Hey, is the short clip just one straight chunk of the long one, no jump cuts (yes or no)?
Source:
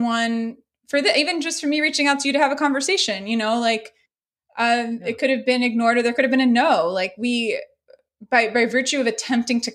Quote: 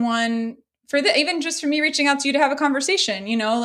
yes